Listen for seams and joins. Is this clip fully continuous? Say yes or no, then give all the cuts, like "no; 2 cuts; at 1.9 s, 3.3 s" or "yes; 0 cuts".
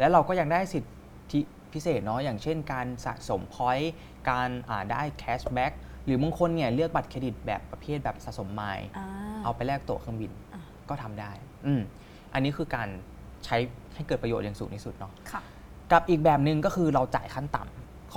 yes; 0 cuts